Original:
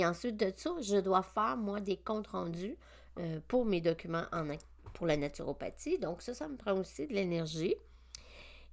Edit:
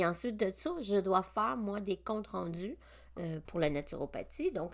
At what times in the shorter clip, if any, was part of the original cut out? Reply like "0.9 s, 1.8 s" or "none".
3.4 s